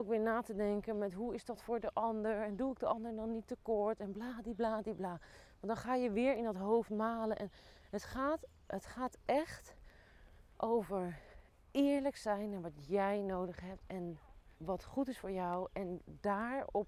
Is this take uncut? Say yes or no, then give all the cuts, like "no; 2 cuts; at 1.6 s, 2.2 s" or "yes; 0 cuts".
no; 2 cuts; at 10.5 s, 14.5 s